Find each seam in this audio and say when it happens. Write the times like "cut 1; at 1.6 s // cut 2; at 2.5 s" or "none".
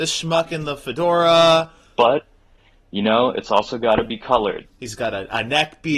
cut 1; at 1.9 s // cut 2; at 4.6 s

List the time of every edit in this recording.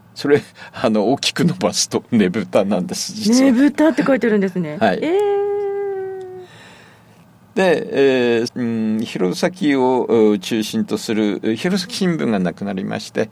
cut 1; at 8.5 s

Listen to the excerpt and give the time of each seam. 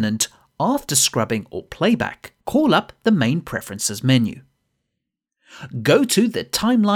cut 1; at 2.4 s

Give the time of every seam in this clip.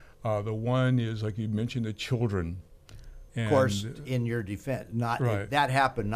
cut 1; at 3.3 s

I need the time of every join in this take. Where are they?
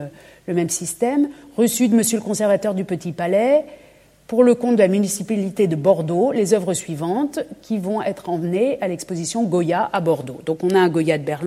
none

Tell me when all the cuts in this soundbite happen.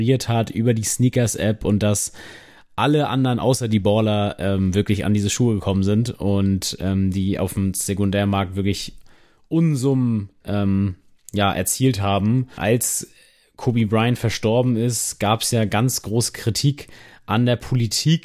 cut 1; at 12.6 s

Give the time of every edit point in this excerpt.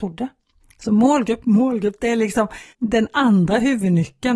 cut 1; at 1.4 s // cut 2; at 2.7 s

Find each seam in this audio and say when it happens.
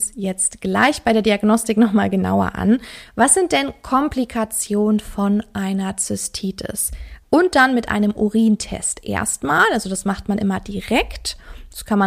cut 1; at 7.2 s

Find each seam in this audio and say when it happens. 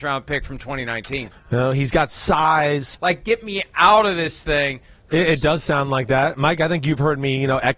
cut 1; at 1.3 s // cut 2; at 2.9 s // cut 3; at 5.1 s

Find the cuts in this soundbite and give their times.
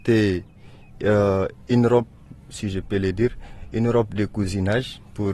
none

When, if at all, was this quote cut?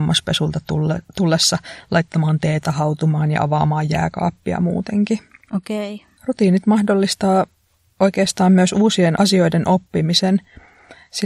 cut 1; at 6.2 s

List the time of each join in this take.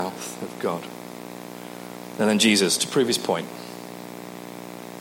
cut 1; at 2.8 s

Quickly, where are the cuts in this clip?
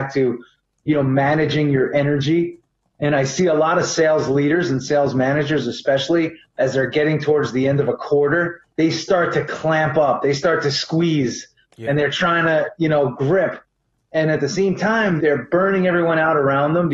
cut 1; at 8.7 s // cut 2; at 15.2 s

